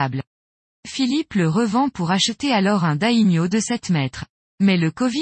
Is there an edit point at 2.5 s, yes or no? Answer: no